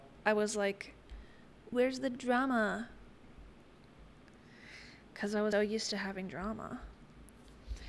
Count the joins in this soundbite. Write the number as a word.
two